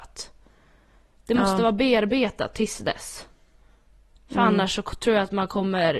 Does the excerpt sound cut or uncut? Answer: uncut